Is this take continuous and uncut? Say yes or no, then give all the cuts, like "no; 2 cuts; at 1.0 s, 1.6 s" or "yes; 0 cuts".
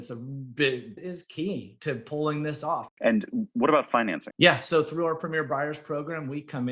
no; 3 cuts; at 1.0 s, 2.9 s, 4.3 s